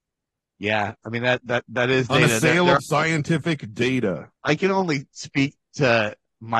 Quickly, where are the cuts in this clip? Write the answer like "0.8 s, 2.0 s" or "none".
2.8 s, 4.3 s